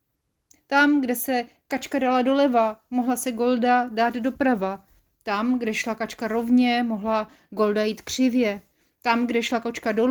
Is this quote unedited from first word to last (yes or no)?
yes